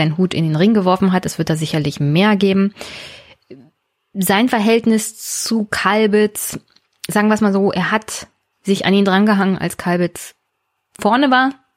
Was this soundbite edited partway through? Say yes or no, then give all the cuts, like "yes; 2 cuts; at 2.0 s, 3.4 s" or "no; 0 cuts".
no; 0 cuts